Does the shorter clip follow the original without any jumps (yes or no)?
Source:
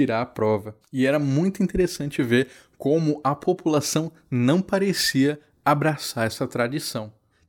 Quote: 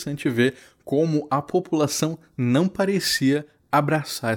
yes